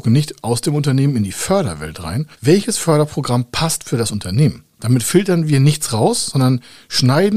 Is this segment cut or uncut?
cut